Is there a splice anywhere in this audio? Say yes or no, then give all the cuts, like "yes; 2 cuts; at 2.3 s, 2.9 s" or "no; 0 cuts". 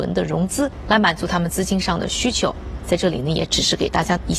yes; 1 cut; at 2.8 s